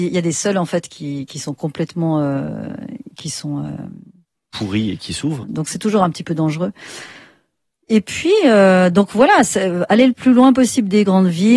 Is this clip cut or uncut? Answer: cut